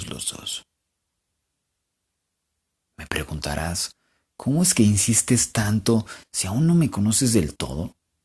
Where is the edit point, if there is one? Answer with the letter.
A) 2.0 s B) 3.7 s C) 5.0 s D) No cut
D